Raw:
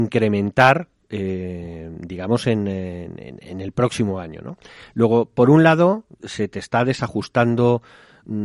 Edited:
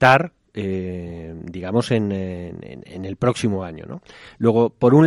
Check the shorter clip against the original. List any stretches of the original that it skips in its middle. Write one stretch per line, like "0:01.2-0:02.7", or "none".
none